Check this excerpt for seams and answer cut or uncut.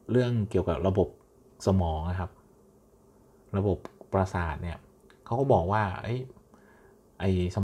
uncut